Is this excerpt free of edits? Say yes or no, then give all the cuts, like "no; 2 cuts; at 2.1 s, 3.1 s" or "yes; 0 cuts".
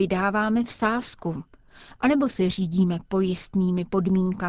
yes; 0 cuts